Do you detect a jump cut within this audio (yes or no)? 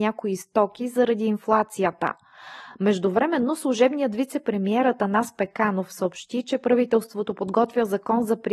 no